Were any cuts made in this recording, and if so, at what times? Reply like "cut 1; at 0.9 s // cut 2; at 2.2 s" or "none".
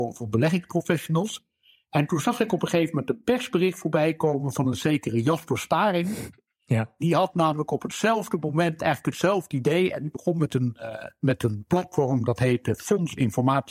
none